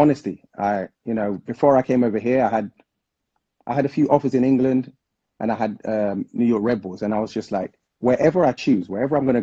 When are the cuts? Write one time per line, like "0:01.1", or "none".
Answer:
0:00.9